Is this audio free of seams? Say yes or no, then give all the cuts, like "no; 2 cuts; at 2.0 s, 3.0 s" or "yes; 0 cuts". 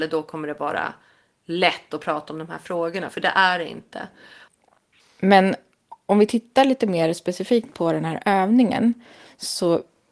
yes; 0 cuts